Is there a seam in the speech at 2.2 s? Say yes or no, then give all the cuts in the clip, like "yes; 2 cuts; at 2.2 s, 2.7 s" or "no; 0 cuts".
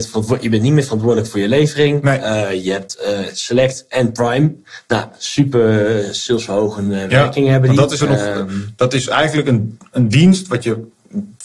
no; 1 cut; at 8.0 s